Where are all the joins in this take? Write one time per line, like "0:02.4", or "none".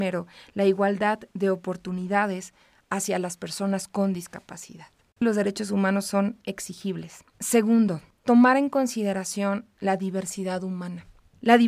0:05.1
0:07.3